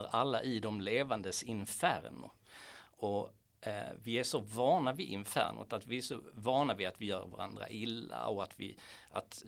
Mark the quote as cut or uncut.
uncut